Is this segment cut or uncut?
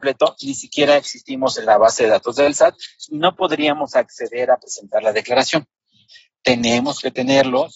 uncut